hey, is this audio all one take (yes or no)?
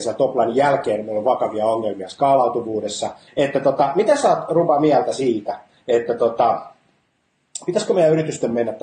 no